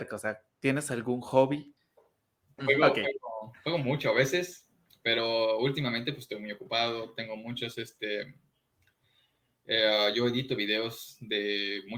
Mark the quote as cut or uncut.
cut